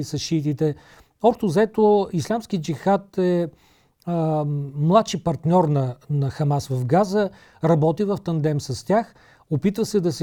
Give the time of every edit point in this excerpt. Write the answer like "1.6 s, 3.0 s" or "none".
none